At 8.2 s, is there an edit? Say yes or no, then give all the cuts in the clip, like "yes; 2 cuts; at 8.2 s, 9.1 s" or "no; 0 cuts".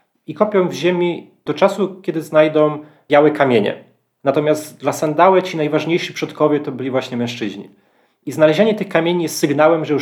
no; 1 cut; at 4.2 s